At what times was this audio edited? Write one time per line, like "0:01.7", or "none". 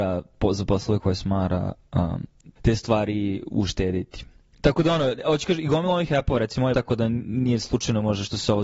0:02.6
0:06.7